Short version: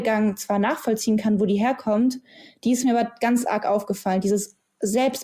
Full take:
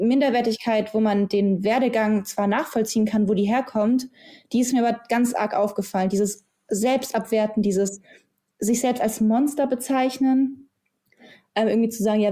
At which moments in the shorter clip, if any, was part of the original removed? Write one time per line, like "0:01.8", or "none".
none